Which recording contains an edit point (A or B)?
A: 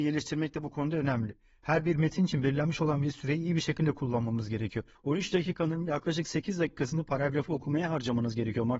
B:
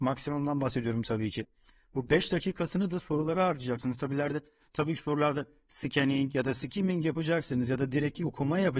A